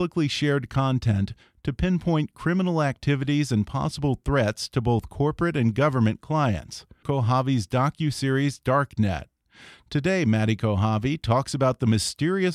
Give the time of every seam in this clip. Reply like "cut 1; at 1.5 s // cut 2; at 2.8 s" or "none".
cut 1; at 7.0 s